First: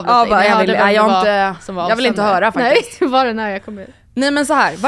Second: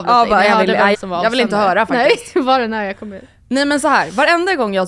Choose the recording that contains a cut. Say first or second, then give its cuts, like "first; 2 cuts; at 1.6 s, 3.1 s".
second; 1 cut; at 0.9 s